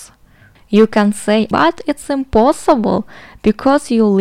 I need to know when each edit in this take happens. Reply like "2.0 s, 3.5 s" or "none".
1.5 s